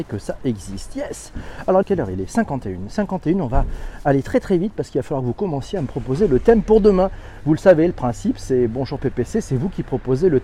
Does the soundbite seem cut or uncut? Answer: cut